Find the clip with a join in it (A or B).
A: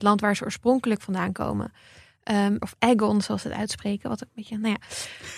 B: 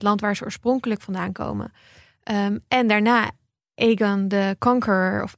A